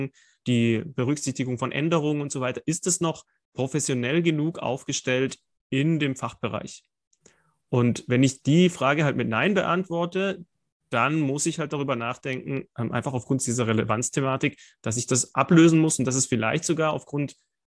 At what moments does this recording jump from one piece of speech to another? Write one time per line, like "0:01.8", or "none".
none